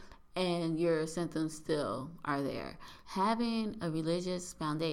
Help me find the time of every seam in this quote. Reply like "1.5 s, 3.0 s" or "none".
3.0 s